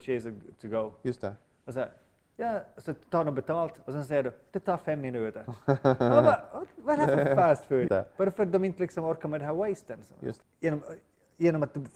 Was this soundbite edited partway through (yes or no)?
yes